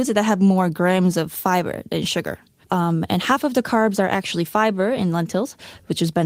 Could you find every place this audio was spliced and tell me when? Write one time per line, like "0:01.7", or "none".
0:02.6